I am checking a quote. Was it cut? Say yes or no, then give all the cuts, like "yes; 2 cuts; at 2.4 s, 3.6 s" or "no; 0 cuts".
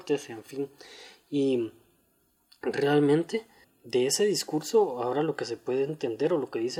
yes; 1 cut; at 3.6 s